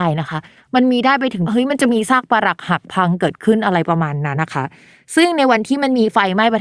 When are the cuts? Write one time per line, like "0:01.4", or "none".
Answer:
0:04.3

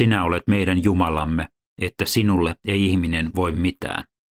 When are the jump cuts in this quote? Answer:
0:01.7

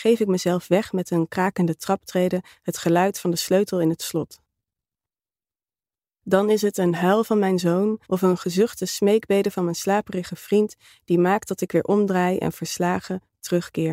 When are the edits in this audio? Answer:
0:08.0

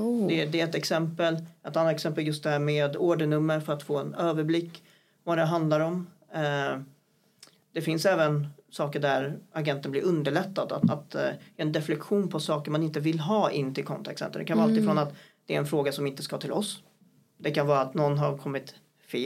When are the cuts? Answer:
0:10.8

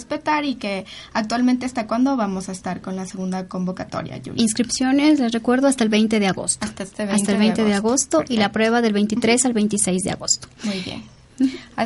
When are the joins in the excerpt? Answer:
none

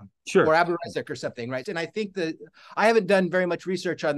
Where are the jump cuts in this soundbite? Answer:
0:01.6

